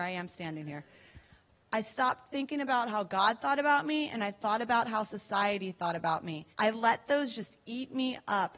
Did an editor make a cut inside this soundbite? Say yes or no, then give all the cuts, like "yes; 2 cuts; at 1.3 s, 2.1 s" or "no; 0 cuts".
yes; 2 cuts; at 1.6 s, 6.5 s